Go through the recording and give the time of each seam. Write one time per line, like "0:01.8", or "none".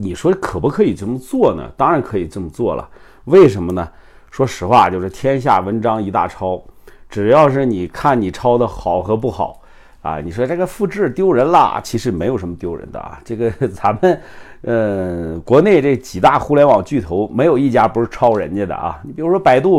0:08.7
0:11.8